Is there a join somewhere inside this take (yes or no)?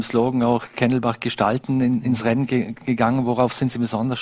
no